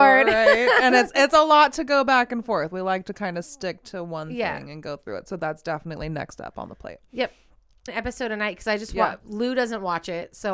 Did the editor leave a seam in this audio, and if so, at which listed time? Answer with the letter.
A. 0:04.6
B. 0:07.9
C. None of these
B